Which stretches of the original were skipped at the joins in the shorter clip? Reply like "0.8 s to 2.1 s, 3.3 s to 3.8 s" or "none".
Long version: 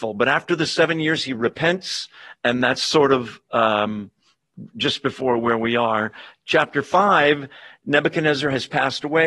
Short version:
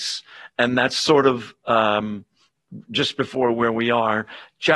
none